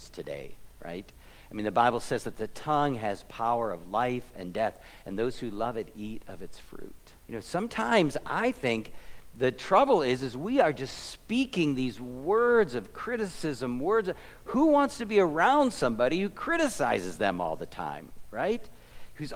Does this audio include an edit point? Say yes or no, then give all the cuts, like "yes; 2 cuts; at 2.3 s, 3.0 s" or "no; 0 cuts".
yes; 1 cut; at 7.2 s